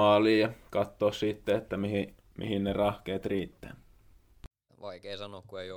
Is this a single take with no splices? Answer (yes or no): no